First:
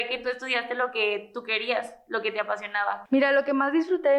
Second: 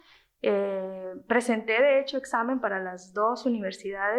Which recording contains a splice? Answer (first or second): first